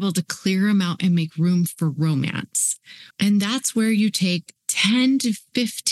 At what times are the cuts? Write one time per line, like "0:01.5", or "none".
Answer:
0:03.1
0:04.6